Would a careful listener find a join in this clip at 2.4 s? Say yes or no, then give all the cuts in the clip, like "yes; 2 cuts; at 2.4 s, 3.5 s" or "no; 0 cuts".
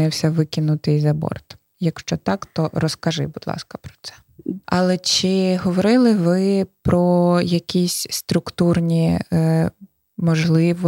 no; 1 cut; at 4.6 s